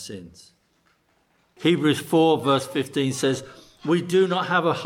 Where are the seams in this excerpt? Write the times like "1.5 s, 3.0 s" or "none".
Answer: 1.6 s